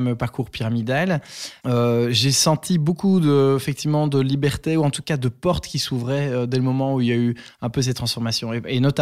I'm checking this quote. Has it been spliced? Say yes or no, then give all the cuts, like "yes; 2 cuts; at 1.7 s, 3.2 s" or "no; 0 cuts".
yes; 1 cut; at 1.6 s